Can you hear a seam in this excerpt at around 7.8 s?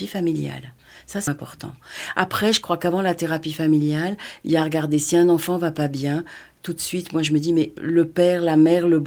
yes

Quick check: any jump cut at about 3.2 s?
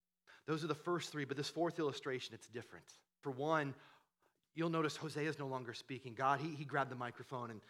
yes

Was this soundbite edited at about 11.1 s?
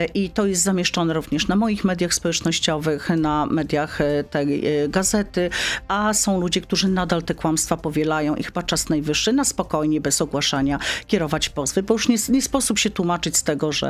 no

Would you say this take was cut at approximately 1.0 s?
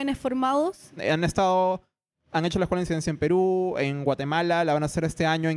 yes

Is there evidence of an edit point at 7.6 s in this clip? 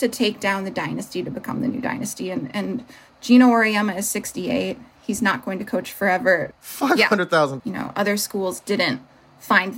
yes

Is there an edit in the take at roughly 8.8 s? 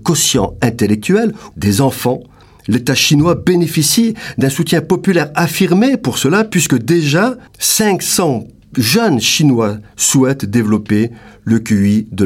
no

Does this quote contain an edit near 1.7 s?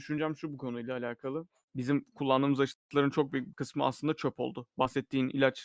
no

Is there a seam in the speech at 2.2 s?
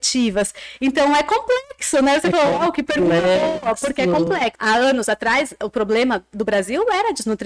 no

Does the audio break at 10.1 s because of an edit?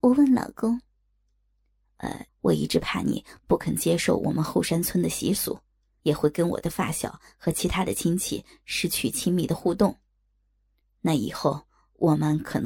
no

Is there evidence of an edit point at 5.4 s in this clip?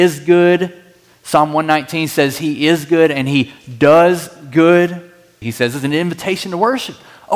yes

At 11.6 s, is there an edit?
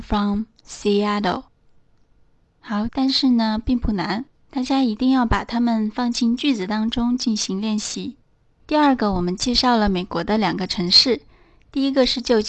no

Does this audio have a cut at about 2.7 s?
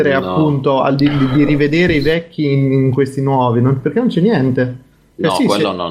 no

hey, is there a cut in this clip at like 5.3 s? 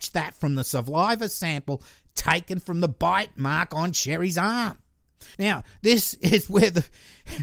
yes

